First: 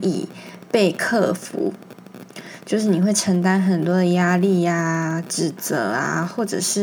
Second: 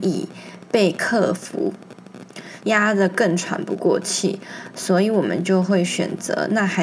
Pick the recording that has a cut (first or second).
second